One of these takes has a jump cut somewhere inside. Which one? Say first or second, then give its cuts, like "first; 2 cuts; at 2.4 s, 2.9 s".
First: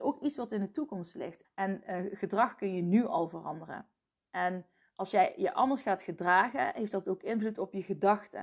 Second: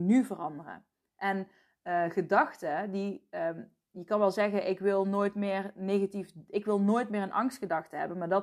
first; 1 cut; at 1.4 s